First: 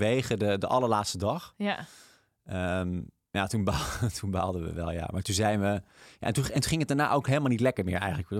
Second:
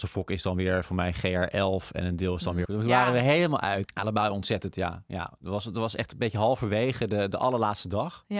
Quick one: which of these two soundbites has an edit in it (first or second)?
second